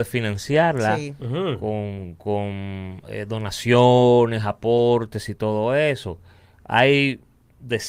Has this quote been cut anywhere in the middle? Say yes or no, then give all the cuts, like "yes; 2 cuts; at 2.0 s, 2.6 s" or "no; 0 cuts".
no; 0 cuts